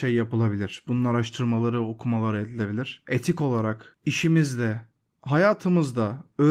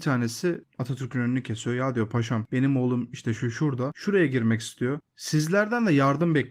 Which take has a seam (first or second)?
second